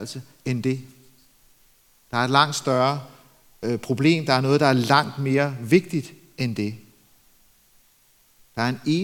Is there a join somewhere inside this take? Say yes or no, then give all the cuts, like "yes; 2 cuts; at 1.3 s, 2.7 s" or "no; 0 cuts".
no; 0 cuts